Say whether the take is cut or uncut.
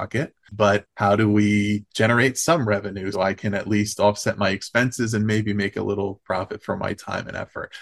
cut